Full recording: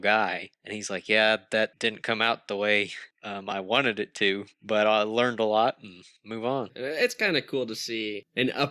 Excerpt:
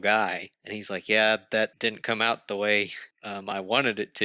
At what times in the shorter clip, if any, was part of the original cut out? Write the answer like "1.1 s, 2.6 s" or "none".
none